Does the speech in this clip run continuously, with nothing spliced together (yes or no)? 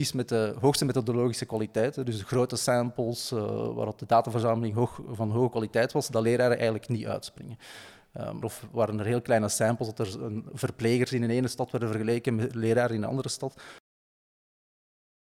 no